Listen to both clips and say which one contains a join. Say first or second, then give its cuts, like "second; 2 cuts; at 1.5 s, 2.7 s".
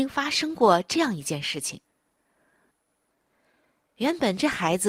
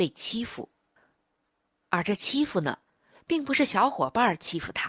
first; 1 cut; at 2.7 s